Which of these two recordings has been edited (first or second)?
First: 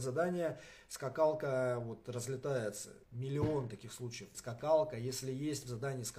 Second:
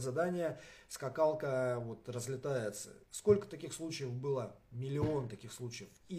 first